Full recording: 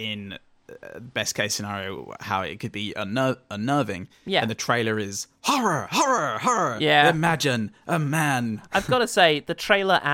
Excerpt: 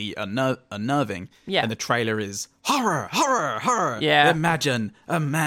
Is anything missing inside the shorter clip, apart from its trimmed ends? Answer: no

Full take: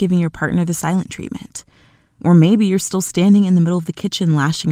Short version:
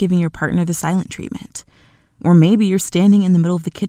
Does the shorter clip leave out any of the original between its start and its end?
yes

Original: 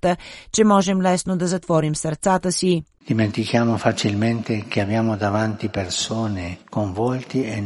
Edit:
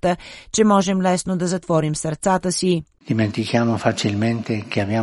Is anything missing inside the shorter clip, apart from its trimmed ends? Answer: no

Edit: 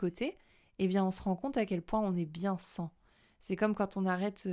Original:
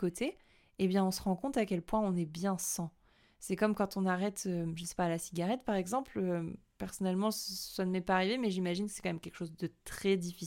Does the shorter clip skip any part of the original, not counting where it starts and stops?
no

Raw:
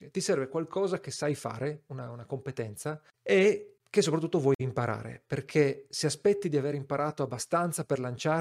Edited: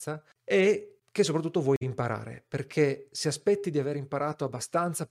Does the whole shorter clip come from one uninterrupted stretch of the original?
yes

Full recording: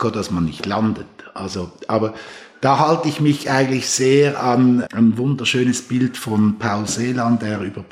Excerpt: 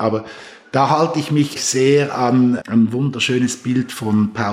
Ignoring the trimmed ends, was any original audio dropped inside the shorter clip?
yes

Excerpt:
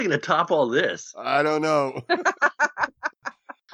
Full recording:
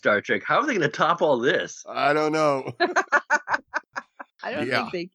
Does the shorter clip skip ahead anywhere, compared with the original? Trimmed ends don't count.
no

